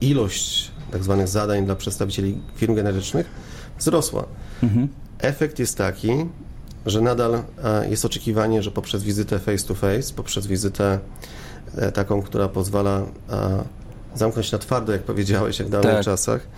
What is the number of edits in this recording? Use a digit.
0